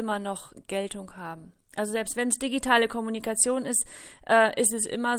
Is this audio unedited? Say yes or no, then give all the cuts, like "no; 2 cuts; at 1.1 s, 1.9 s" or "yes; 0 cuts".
yes; 0 cuts